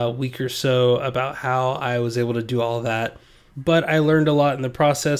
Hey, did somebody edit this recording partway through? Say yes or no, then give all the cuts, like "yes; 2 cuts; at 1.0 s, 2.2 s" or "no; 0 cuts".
yes; 1 cut; at 3.5 s